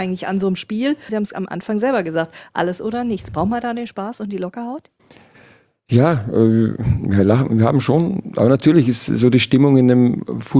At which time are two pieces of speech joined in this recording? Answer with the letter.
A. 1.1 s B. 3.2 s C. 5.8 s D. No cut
A